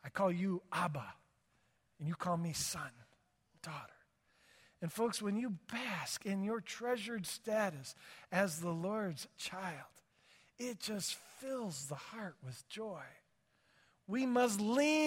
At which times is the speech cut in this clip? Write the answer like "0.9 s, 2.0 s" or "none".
none